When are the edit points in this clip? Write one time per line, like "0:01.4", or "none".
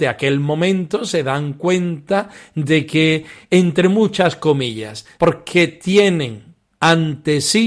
0:05.2